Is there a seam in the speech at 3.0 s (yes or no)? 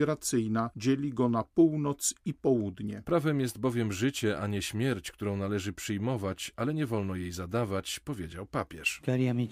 yes